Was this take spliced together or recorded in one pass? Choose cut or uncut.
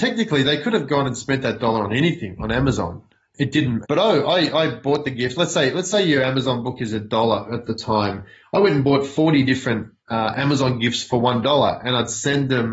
cut